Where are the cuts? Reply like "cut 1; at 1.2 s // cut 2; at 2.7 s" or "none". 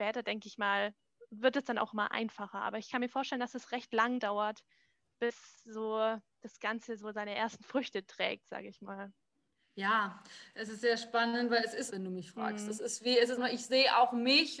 cut 1; at 11.9 s // cut 2; at 13.4 s